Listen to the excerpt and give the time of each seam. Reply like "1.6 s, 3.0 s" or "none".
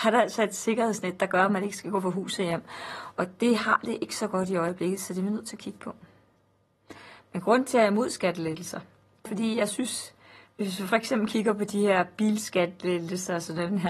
9.2 s